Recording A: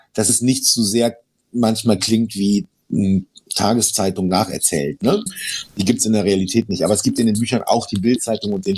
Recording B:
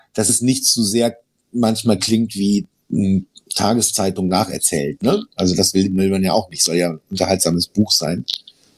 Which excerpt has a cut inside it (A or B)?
A